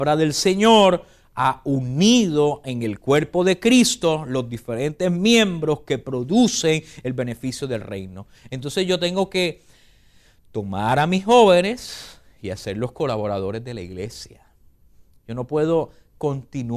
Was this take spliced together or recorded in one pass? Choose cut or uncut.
uncut